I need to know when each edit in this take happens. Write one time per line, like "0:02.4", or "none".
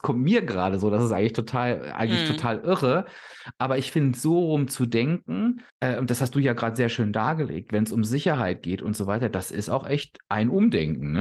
0:05.7